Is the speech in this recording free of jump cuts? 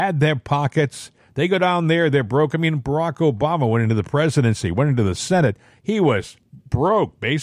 yes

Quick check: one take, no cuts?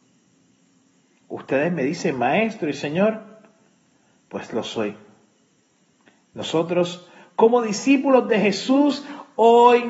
yes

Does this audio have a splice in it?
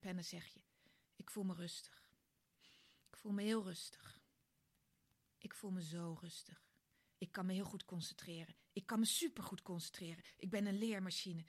yes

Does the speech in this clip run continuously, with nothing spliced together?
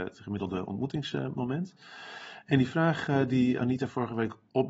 yes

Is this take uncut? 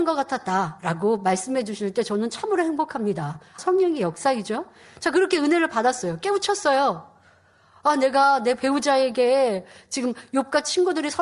no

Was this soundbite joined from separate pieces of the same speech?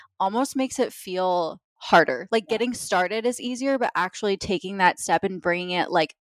no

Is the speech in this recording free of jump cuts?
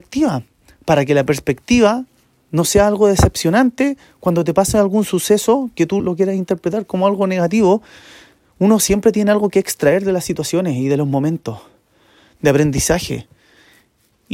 no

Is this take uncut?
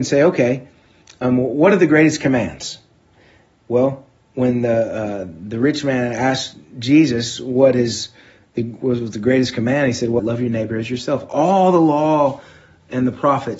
no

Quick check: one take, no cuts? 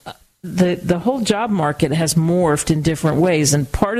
yes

